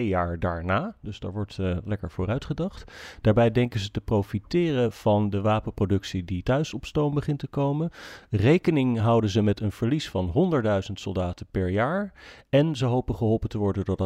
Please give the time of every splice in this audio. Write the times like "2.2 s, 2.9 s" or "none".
none